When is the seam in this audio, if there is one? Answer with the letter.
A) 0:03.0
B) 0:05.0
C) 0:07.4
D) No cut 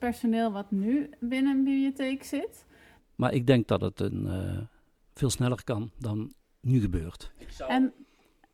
A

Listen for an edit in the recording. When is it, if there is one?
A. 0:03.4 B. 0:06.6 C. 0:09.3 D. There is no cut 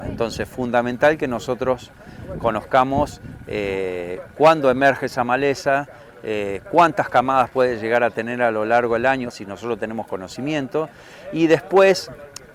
C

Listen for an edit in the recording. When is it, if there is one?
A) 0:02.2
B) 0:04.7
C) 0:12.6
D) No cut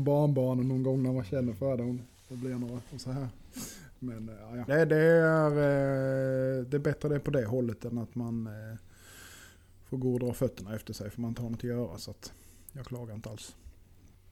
B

